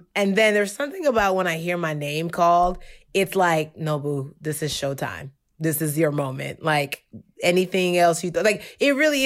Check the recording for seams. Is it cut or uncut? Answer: uncut